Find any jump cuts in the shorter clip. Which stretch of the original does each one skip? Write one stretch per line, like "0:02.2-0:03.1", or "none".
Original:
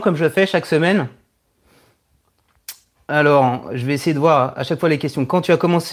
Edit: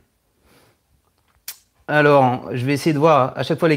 none